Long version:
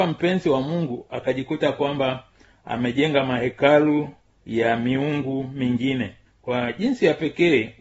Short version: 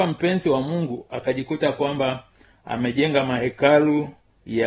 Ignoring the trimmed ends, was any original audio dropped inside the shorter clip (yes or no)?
no